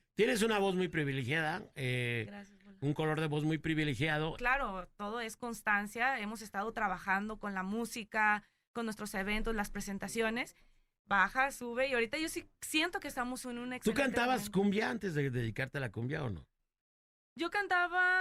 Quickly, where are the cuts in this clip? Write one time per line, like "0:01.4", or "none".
0:04.4

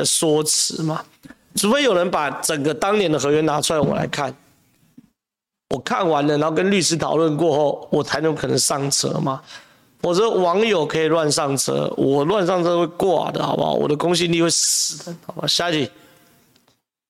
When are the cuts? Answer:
none

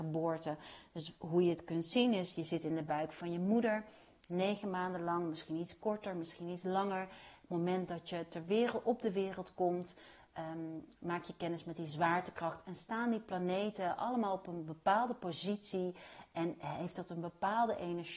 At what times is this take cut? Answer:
none

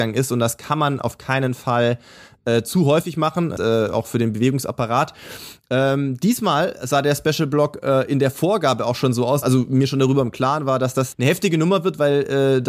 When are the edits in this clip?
0:03.6
0:09.4
0:11.1

